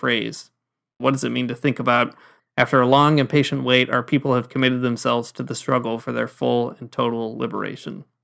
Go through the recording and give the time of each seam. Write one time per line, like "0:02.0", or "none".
0:01.0
0:02.4